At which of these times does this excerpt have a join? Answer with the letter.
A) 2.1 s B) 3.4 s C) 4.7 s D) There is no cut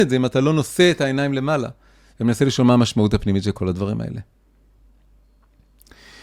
D